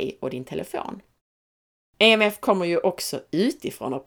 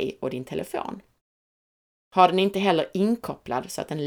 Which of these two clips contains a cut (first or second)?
first